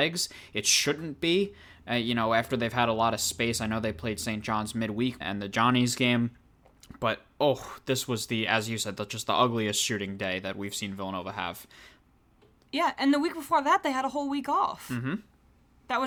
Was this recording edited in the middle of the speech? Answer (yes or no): yes